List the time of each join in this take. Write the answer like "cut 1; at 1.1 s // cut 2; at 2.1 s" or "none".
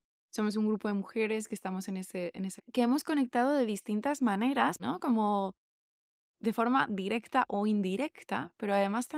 cut 1; at 2.6 s // cut 2; at 4.8 s